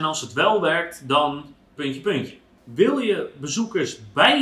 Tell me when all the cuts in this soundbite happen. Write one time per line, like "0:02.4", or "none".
0:01.8